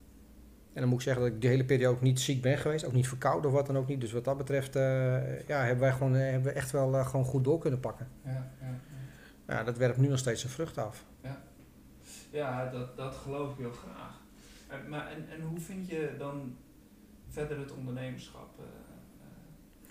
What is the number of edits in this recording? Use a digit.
2